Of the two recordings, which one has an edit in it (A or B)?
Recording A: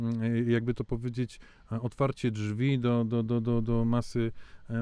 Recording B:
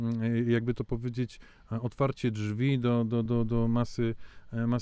B